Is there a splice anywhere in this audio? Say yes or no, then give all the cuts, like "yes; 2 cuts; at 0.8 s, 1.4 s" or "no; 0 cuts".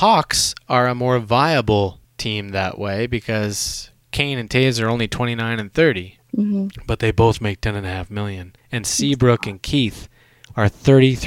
no; 0 cuts